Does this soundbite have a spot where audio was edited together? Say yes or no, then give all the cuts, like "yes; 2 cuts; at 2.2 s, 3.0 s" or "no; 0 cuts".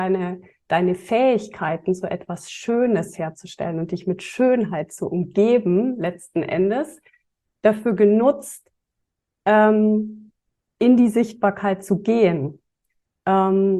no; 0 cuts